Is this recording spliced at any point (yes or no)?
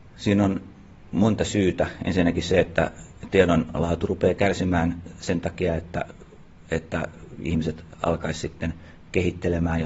no